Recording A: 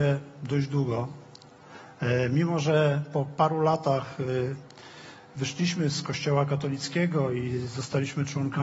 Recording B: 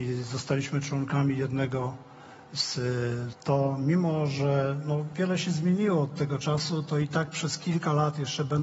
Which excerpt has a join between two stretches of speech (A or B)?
B